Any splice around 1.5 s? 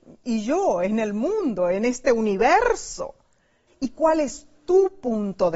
no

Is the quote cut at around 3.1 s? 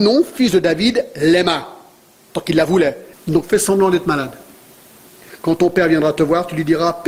yes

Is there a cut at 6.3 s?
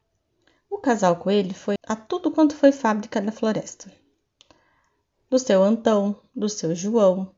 no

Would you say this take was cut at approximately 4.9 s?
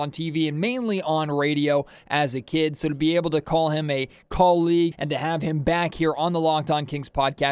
yes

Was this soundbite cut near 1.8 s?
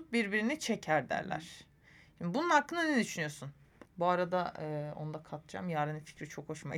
no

